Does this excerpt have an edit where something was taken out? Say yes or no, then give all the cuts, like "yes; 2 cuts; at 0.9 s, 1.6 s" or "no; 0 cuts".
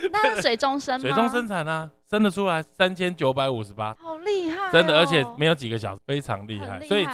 yes; 3 cuts; at 2.6 s, 4.0 s, 6.0 s